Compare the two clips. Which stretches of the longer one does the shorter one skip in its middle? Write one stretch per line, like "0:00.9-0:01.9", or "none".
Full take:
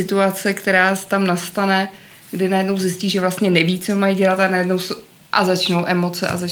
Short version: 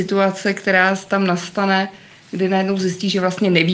none